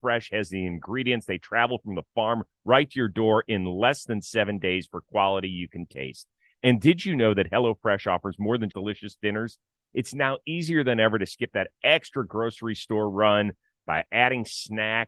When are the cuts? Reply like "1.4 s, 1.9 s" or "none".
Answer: 8.7 s